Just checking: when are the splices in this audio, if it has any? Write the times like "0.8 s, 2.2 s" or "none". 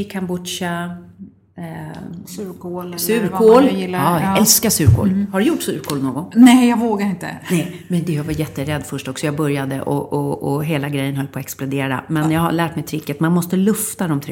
none